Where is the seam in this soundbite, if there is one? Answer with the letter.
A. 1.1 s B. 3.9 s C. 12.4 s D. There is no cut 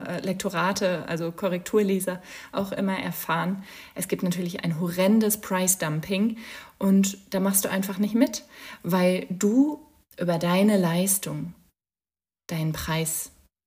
D